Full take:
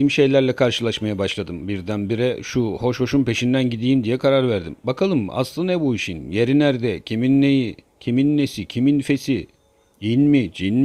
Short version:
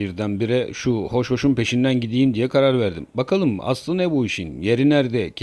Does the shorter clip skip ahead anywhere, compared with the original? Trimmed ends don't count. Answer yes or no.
no